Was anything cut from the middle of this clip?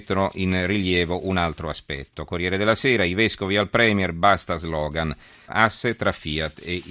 yes; 1 cut; at 5.5 s

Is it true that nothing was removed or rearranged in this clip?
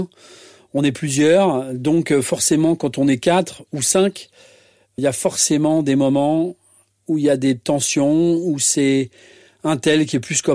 no; 1 cut; at 5.0 s

